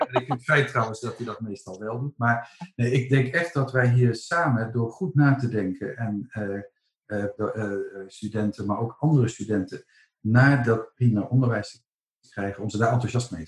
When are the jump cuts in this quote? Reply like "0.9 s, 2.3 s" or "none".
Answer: 7.4 s